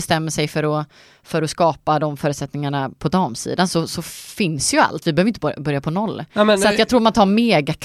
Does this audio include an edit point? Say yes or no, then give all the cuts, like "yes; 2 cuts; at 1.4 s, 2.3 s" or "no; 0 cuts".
no; 0 cuts